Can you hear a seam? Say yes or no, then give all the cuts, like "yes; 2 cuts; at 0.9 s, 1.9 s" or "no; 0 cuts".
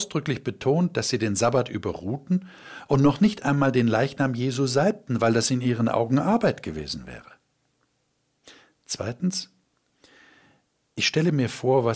no; 0 cuts